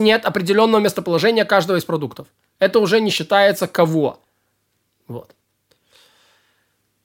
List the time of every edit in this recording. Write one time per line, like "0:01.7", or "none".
none